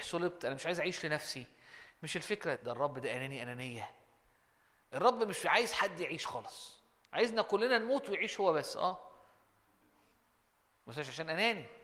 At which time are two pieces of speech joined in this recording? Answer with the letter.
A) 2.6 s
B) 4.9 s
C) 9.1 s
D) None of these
A